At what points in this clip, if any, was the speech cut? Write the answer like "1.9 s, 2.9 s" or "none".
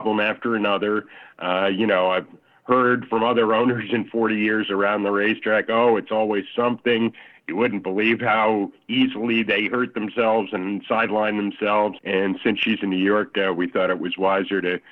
12.0 s, 13.3 s